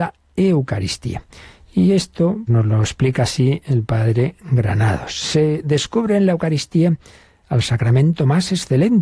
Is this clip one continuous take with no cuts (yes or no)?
no